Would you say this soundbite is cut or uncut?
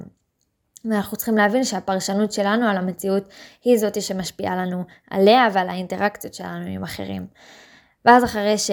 uncut